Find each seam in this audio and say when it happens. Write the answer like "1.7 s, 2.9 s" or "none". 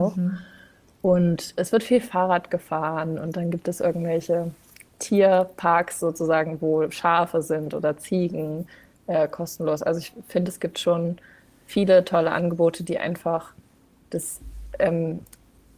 none